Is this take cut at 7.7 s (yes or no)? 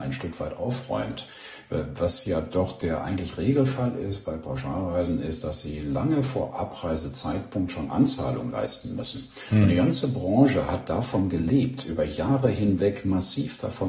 no